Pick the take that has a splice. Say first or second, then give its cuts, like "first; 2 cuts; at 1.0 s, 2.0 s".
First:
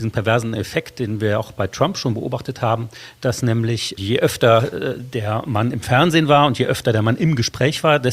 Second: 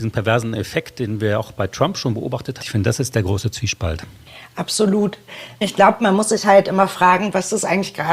second; 1 cut; at 2.6 s